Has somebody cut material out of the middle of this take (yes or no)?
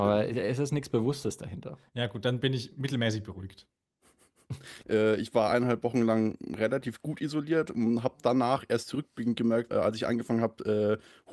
yes